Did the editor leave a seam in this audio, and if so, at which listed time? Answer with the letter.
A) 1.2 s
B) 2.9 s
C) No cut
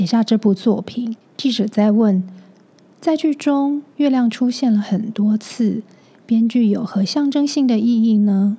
A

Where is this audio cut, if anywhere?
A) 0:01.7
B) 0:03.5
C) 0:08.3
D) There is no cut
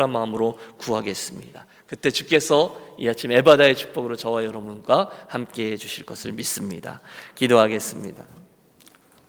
D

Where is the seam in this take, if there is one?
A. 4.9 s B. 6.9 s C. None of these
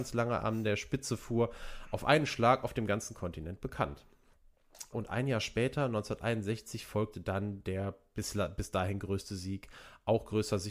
A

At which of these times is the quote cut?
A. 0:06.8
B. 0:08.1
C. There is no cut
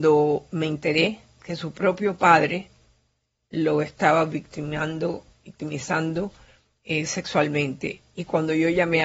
C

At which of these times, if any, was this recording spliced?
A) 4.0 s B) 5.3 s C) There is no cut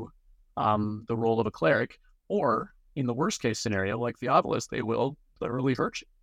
C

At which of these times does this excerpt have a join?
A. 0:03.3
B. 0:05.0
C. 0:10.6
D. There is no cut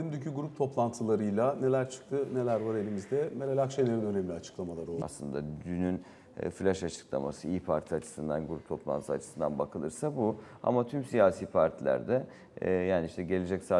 B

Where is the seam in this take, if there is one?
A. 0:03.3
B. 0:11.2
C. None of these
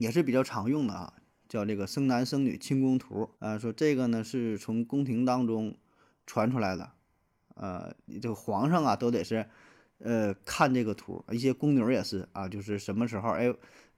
A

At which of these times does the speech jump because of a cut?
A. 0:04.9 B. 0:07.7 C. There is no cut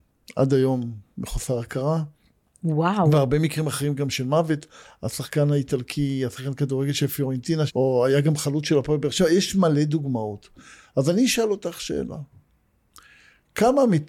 B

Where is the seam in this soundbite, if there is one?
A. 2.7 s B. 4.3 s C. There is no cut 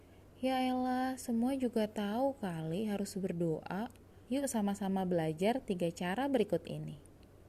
B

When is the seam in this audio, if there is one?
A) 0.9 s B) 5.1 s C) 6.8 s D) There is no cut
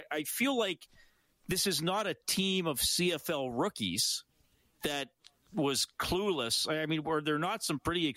D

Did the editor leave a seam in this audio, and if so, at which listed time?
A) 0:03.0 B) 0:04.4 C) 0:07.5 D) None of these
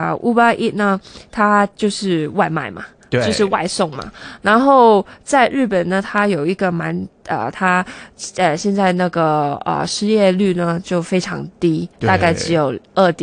C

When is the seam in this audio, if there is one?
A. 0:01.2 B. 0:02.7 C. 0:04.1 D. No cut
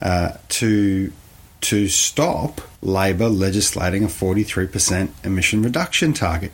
B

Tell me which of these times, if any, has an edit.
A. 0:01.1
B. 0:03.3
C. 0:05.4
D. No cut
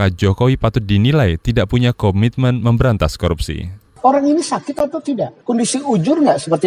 D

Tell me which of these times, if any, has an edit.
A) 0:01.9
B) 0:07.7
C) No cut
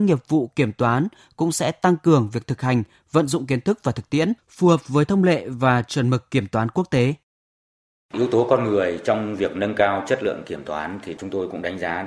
C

